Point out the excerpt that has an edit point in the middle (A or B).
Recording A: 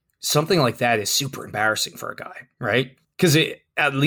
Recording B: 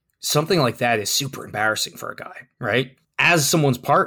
A